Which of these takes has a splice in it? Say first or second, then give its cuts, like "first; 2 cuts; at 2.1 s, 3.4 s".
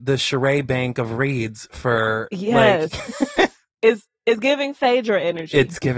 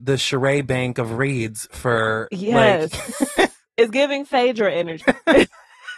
second; 2 cuts; at 3.7 s, 5.0 s